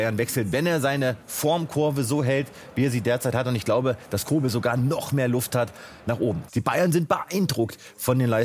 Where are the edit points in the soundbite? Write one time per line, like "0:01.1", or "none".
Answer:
0:06.5